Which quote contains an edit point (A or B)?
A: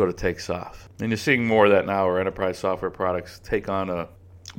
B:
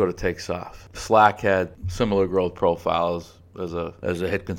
A